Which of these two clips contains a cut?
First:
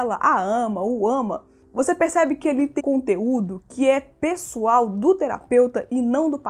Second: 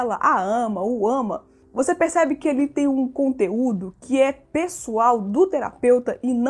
first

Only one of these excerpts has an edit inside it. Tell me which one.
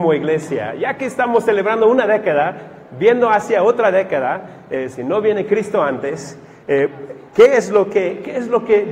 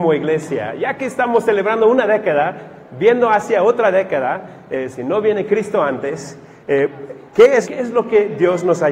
second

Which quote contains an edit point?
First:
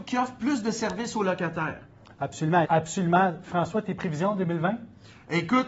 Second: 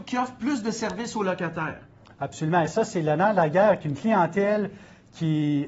first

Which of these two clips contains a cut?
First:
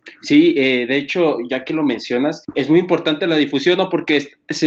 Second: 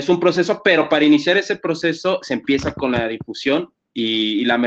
first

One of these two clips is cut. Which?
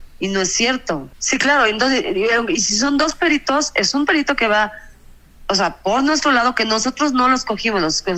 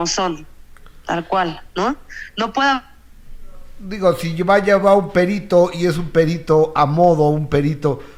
first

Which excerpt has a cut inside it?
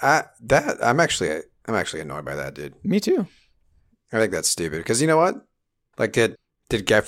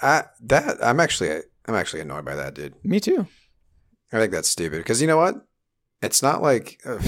first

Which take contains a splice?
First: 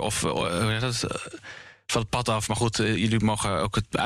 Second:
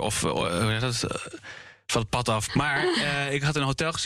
second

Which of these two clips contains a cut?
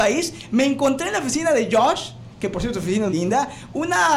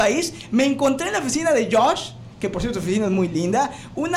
first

